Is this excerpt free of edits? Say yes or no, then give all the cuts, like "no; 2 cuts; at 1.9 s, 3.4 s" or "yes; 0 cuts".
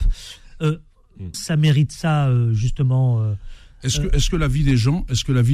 no; 1 cut; at 1.3 s